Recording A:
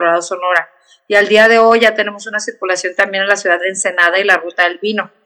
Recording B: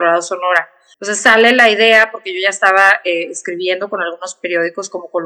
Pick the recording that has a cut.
B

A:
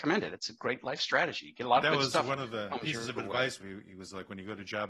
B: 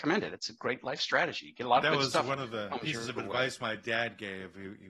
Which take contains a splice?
A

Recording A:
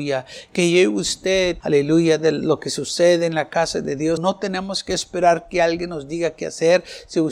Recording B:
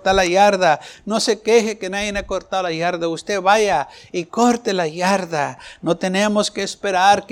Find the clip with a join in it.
A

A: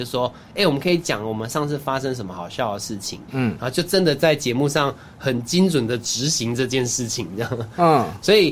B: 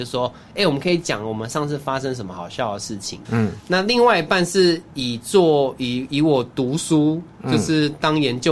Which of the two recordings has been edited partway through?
B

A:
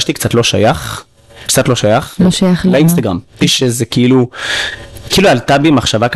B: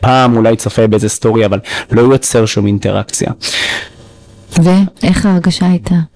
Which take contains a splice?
A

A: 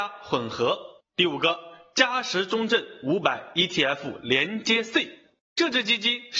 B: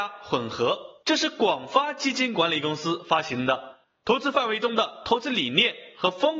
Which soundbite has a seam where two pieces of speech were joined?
A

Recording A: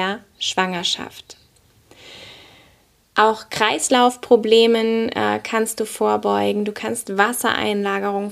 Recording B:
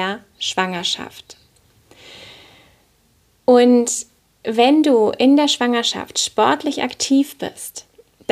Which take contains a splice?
A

